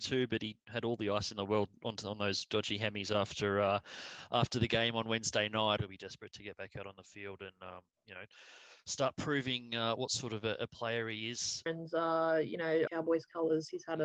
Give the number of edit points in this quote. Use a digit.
3